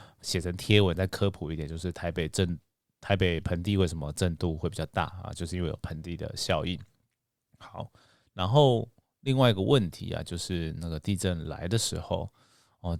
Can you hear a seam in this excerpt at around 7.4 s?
no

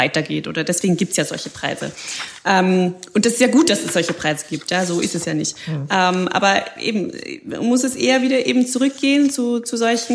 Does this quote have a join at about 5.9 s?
no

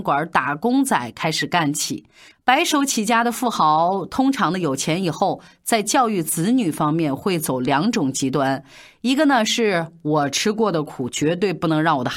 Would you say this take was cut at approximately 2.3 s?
yes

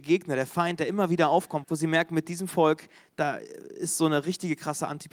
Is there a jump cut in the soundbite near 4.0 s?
no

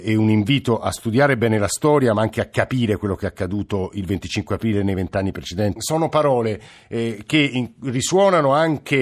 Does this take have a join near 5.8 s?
yes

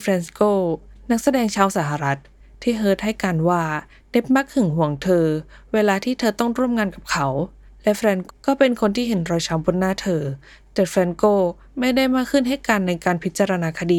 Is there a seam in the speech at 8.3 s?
yes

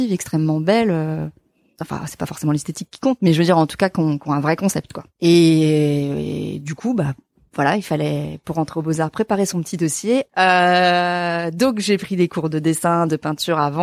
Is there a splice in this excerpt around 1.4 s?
no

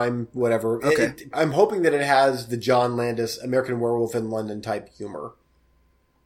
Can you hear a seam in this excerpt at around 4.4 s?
no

